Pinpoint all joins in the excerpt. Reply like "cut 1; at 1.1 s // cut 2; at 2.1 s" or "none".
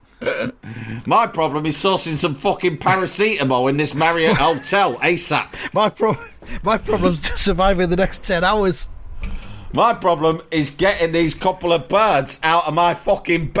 none